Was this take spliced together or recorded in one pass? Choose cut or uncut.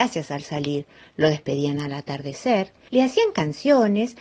cut